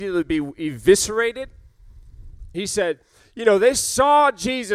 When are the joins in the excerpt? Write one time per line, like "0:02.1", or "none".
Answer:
0:02.5